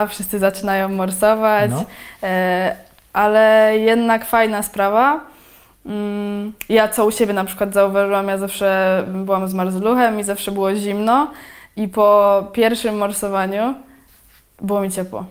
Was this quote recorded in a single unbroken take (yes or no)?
yes